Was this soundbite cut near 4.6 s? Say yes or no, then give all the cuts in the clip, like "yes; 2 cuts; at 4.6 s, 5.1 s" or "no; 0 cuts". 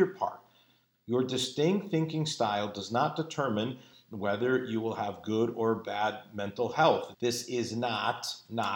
no; 2 cuts; at 0.9 s, 7.1 s